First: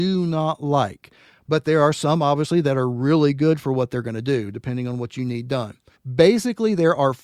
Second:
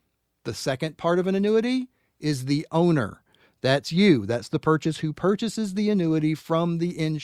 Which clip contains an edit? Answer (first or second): first